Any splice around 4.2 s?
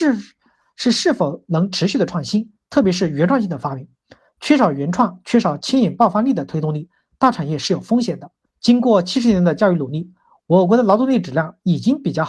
no; 1 cut; at 8.5 s

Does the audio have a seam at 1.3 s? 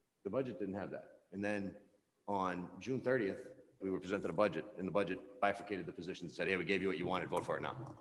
no; 1 cut; at 3.8 s

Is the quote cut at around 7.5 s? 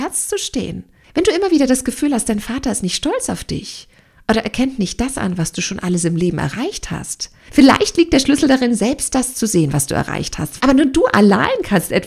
yes; 2 cuts; at 7.5 s, 10.6 s

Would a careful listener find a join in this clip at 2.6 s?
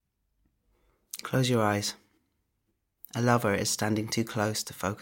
no; 0 cuts

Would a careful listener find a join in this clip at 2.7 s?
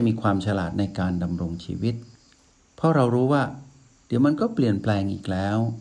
no; 0 cuts

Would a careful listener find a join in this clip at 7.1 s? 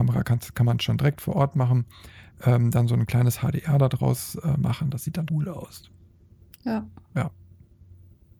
no; 1 cut; at 5.3 s

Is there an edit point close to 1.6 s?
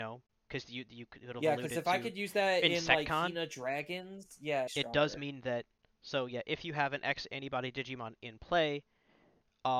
no; 1 cut; at 4.7 s

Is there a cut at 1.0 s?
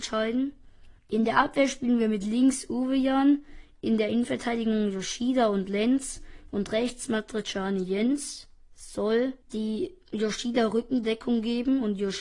yes; 2 cuts; at 1.0 s, 9.4 s

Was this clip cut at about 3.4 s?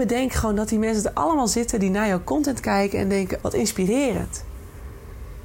yes; 1 cut; at 3.4 s

